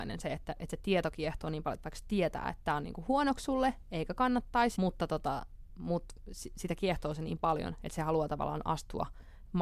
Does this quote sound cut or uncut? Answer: cut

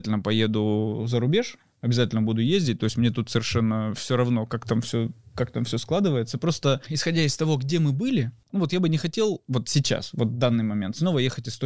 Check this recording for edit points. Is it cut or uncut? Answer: uncut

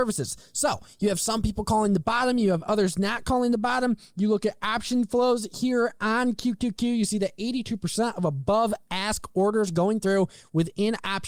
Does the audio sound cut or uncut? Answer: uncut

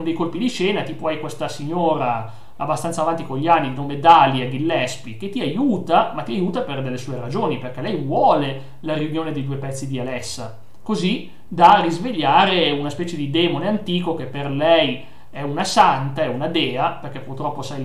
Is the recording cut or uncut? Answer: uncut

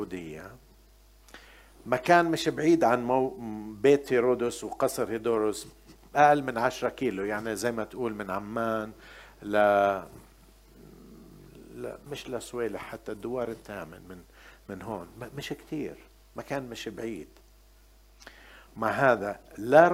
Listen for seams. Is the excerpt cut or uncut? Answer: cut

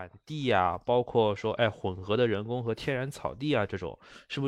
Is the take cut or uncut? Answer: uncut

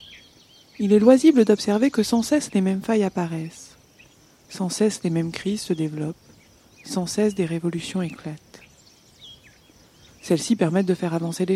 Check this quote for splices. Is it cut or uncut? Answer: uncut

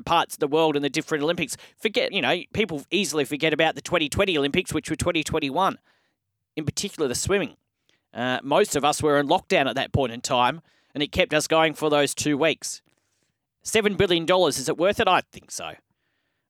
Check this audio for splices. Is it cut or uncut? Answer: cut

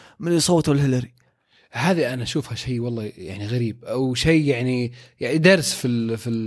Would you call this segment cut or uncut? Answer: uncut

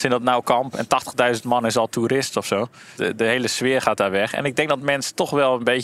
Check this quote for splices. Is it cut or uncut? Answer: uncut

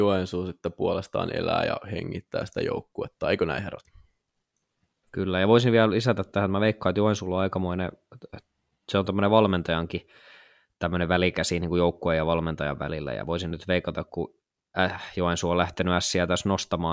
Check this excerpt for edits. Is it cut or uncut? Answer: cut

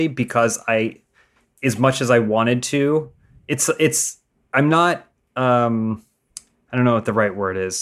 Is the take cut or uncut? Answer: uncut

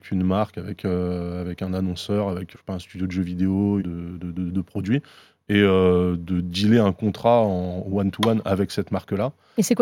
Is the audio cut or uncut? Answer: cut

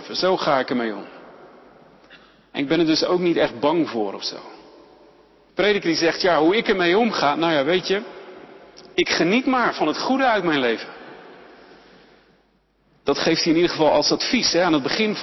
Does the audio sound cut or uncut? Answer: cut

